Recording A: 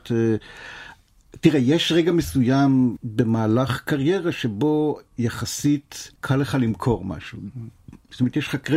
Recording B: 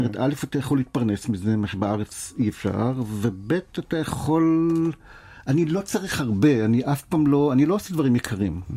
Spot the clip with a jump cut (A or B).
A